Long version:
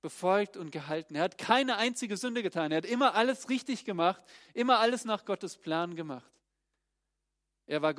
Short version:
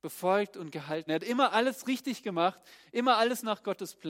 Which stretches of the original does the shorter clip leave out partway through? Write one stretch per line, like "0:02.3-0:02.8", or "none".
0:01.1-0:02.7